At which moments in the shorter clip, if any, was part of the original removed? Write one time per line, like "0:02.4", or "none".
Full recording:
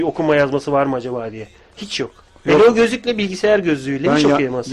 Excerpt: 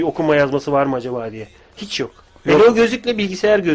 none